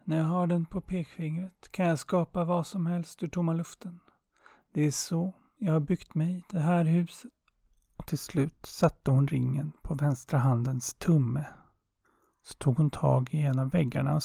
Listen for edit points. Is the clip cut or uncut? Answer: uncut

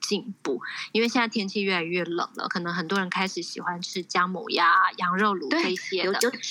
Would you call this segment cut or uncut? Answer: uncut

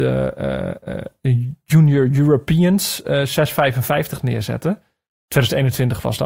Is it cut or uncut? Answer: uncut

